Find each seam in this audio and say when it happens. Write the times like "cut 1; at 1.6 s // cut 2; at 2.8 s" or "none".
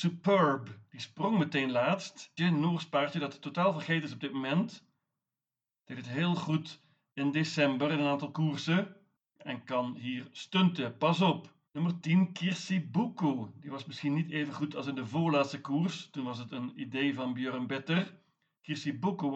cut 1; at 2.4 s // cut 2; at 11.7 s